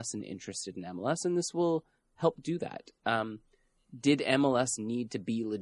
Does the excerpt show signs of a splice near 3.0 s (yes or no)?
no